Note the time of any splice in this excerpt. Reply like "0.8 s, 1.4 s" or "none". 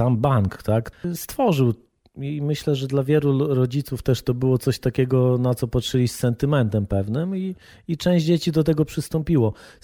none